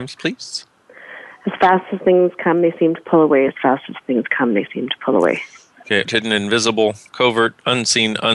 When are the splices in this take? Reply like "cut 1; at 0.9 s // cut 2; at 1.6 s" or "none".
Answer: cut 1; at 3.5 s // cut 2; at 6.0 s